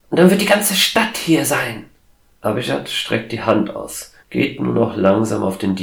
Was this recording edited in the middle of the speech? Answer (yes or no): yes